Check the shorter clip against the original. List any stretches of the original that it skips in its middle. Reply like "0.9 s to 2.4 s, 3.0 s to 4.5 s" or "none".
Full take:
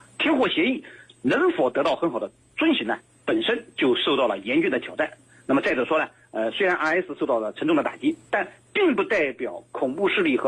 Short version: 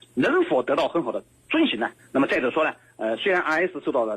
3.1 s to 5.3 s